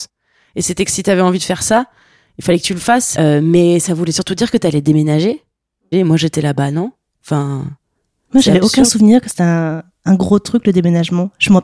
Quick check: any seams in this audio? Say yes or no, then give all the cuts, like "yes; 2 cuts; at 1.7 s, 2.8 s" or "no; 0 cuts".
yes; 1 cut; at 5.9 s